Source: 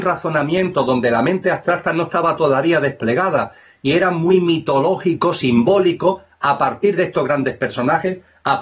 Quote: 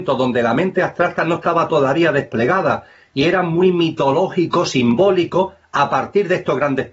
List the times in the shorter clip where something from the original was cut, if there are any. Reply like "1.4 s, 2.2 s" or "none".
none